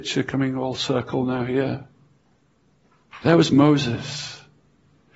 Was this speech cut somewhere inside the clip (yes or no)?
no